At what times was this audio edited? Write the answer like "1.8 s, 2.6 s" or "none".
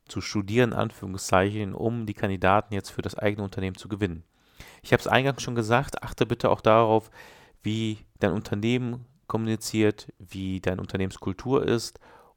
none